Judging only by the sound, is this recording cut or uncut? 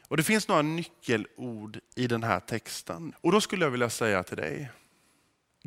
cut